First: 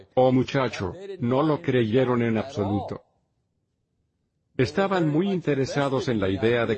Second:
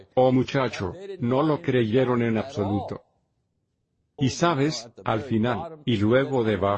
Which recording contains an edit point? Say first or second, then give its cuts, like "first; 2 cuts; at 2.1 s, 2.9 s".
second; 1 cut; at 4.2 s